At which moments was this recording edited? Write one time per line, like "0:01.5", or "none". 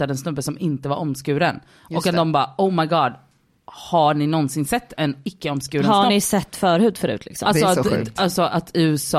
none